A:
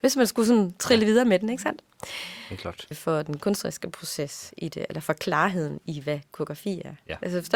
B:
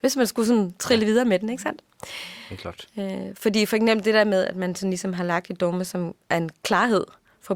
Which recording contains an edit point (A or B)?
A